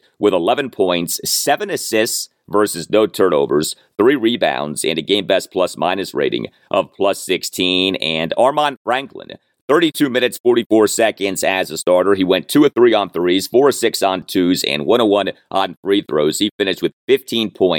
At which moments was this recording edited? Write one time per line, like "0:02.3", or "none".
none